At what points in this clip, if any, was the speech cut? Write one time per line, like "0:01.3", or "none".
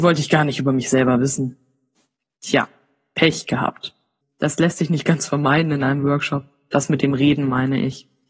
0:04.2